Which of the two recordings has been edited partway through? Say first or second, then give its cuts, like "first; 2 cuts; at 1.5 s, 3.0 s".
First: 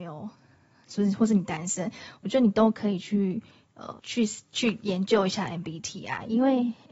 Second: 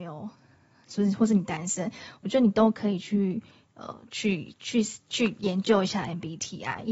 first; 1 cut; at 4.0 s